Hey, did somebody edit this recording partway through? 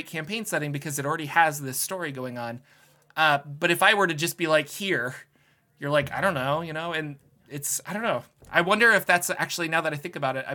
no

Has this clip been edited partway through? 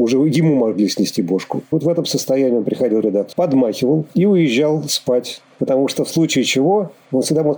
yes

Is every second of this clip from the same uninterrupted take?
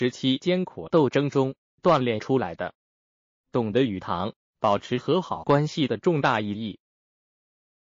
yes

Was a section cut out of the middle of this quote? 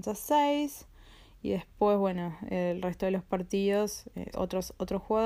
yes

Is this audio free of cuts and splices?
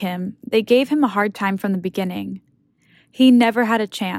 yes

